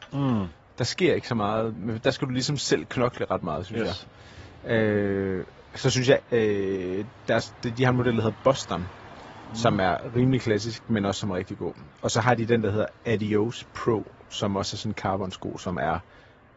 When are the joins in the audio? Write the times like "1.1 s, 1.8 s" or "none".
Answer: 6.2 s